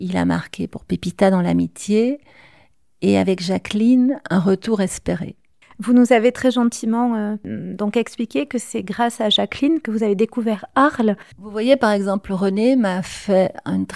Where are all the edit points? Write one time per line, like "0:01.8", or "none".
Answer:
0:05.6
0:11.3